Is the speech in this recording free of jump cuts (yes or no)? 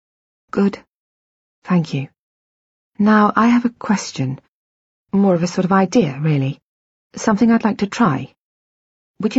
yes